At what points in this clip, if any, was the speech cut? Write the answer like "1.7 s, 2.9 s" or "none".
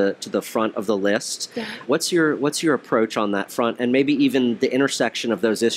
1.8 s

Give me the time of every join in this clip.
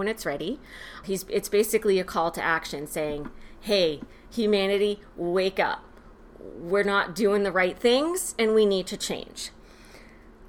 1.0 s

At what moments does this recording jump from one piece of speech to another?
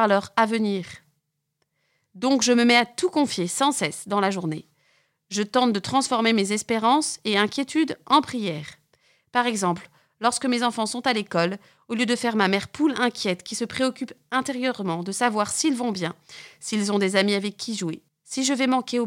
none

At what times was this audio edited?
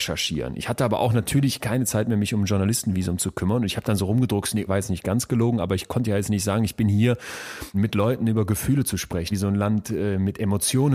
4.7 s, 7.7 s, 9.3 s

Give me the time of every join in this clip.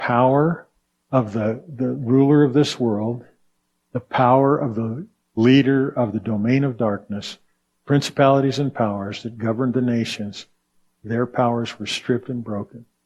none

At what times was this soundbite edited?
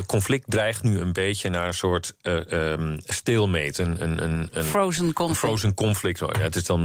none

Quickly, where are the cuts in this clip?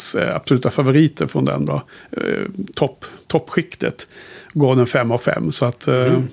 1.7 s

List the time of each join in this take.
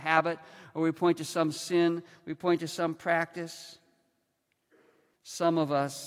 5.1 s

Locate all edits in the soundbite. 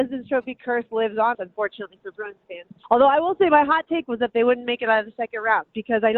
1.3 s, 2.8 s

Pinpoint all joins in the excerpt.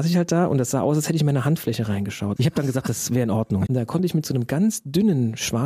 2.4 s, 3.7 s

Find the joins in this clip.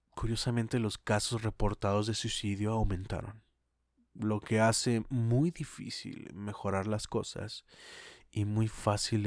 none

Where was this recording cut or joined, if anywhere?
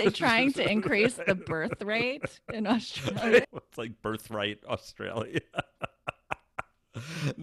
3.4 s

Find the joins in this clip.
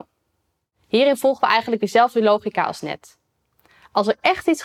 none

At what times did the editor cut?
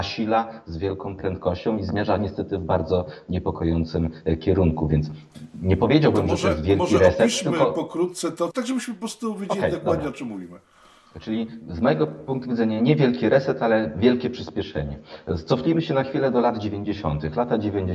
8.5 s

